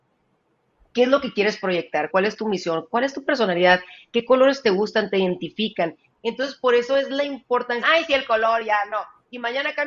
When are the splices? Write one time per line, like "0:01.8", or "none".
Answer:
0:02.1
0:06.2
0:07.8